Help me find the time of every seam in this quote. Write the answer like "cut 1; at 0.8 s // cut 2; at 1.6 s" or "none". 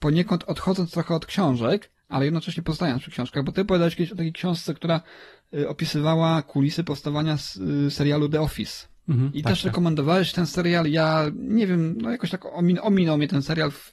none